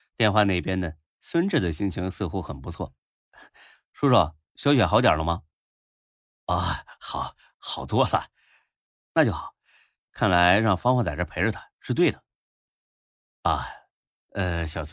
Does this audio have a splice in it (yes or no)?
no